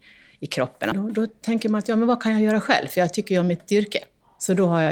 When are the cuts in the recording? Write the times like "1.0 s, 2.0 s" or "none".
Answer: 0.9 s